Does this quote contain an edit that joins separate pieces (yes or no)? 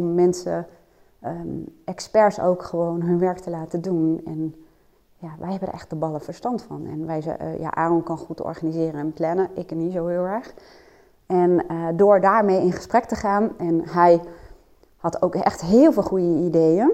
no